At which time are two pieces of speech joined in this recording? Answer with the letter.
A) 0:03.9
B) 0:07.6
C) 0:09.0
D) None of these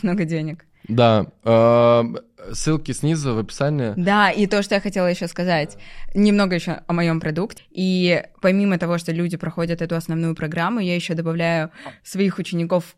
B